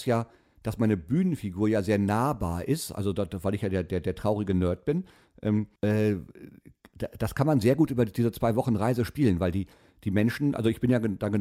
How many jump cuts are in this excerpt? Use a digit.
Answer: 1